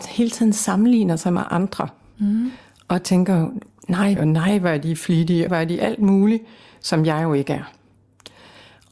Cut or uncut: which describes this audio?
cut